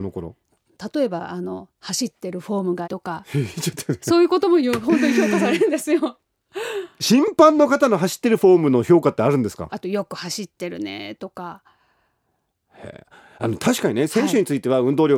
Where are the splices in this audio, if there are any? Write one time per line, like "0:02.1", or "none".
0:02.8
0:09.7